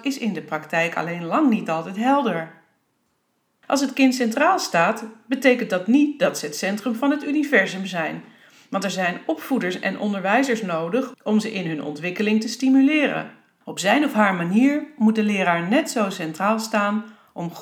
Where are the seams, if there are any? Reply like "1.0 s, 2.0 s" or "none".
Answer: 3.6 s, 13.6 s